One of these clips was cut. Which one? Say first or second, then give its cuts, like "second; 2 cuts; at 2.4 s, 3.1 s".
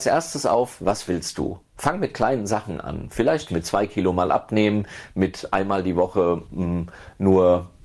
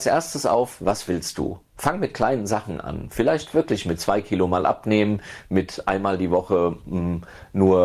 first; 1 cut; at 3.5 s